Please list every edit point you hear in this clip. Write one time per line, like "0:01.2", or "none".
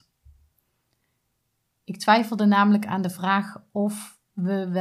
none